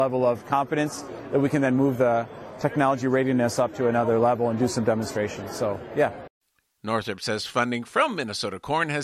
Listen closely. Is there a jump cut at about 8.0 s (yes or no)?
no